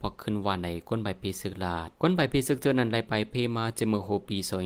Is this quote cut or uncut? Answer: cut